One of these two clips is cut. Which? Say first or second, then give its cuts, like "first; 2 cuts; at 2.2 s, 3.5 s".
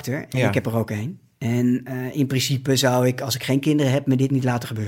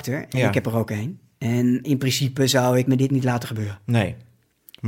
second; 2 cuts; at 1.8 s, 2.8 s